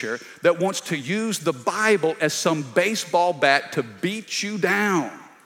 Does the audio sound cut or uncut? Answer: uncut